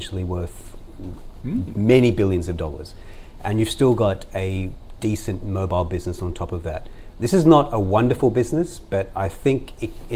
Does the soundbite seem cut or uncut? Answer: uncut